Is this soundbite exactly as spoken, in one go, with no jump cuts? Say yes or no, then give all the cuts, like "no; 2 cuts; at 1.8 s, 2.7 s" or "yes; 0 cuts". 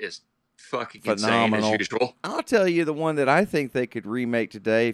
no; 1 cut; at 2.1 s